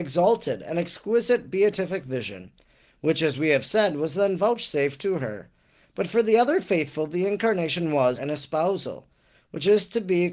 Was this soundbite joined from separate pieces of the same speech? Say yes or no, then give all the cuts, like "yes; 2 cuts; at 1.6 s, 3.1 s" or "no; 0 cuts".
yes; 1 cut; at 8.2 s